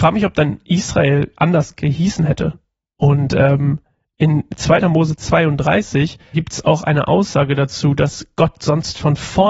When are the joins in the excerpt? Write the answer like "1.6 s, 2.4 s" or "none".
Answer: 3.0 s, 4.8 s, 6.3 s